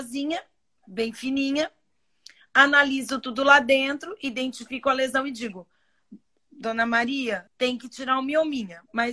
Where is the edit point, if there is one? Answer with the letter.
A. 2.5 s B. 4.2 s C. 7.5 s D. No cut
C